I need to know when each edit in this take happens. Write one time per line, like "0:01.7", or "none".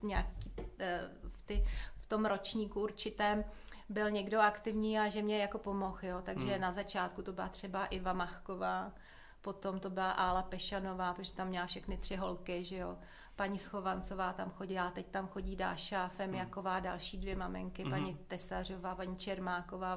none